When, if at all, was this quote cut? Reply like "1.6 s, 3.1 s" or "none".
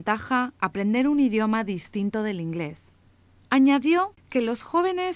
3.4 s